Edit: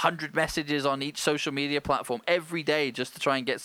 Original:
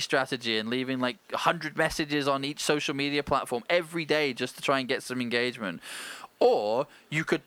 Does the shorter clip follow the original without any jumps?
yes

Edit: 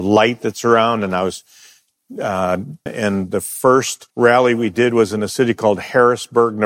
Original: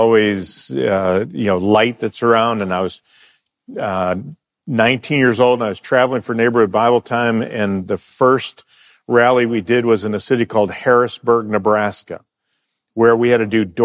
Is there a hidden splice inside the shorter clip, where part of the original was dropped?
yes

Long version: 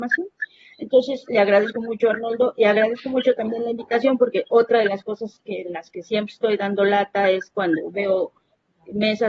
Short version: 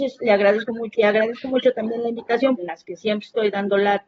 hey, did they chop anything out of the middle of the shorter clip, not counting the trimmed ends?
yes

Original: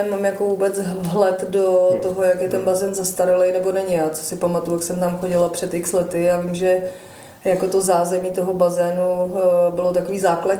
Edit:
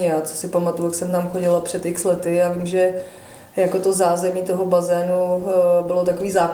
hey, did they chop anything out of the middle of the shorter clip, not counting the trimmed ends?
no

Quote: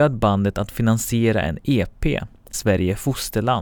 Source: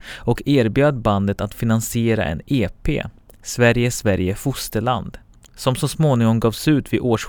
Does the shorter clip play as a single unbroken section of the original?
no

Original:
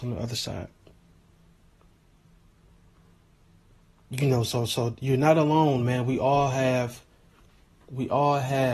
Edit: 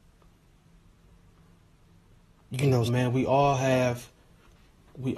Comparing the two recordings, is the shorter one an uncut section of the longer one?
no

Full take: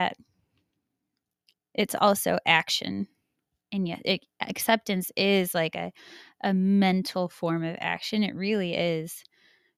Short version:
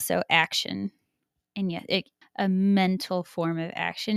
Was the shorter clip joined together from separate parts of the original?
yes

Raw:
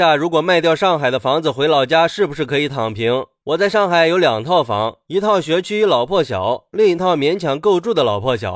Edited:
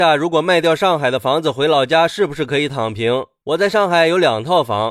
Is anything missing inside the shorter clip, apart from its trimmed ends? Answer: no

